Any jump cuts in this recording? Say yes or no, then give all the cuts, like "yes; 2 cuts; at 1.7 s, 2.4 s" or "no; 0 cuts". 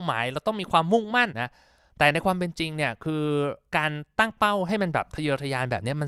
yes; 2 cuts; at 1.3 s, 3.7 s